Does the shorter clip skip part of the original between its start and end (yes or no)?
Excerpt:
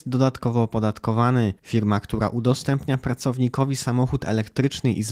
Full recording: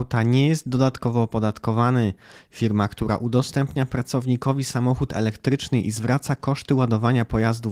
yes